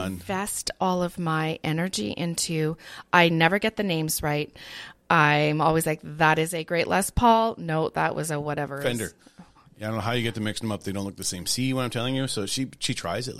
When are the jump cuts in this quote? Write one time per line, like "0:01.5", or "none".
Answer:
none